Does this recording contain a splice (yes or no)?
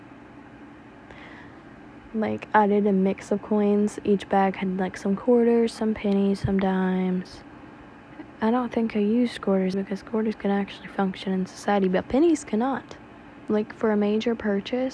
yes